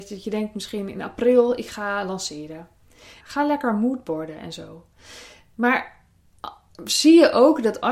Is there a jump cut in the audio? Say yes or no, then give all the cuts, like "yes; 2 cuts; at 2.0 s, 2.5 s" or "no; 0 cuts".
yes; 1 cut; at 3.2 s